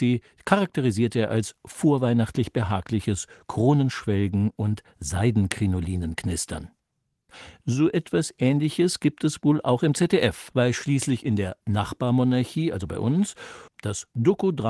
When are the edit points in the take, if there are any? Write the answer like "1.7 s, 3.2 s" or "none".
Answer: 10.5 s, 13.7 s